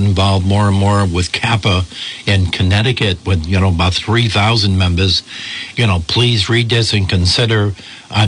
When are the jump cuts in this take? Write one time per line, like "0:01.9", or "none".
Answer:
0:05.7